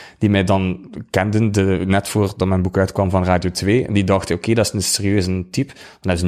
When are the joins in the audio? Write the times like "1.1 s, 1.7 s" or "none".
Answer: none